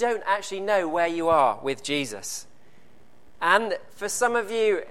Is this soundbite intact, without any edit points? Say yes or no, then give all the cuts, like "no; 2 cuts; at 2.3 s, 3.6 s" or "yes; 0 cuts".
no; 1 cut; at 3.3 s